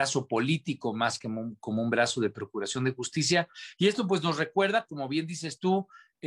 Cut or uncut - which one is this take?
uncut